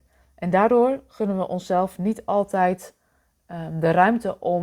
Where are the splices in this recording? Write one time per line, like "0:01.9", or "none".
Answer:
none